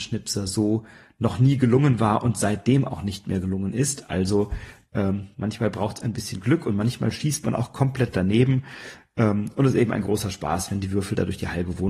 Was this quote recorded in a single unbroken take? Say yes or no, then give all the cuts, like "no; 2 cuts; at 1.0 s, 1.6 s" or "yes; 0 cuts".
yes; 0 cuts